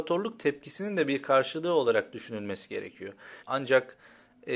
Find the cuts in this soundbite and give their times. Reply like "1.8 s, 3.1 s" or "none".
3.4 s